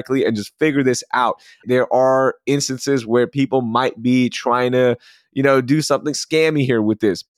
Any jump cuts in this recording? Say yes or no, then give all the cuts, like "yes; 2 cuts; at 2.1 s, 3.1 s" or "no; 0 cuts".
yes; 1 cut; at 1.6 s